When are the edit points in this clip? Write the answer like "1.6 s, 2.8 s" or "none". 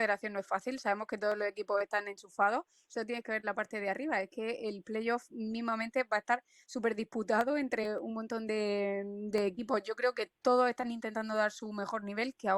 none